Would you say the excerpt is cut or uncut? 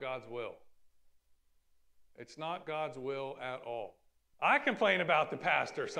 cut